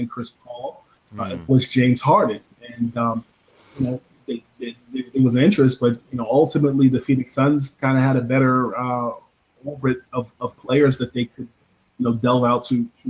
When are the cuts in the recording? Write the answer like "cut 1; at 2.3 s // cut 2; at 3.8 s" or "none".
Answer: cut 1; at 1.5 s